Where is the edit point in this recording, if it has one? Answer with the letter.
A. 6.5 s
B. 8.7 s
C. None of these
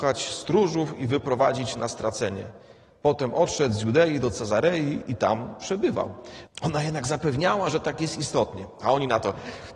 A